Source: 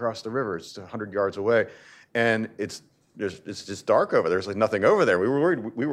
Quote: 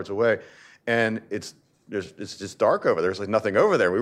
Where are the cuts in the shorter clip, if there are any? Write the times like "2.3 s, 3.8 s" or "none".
none